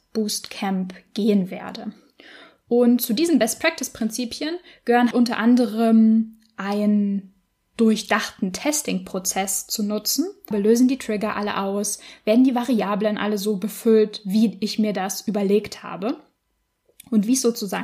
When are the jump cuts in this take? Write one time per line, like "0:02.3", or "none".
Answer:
0:05.1
0:10.5